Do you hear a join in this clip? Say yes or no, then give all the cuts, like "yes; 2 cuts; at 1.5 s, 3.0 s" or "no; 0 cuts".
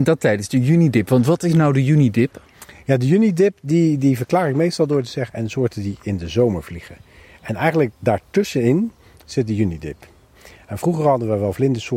yes; 1 cut; at 5.3 s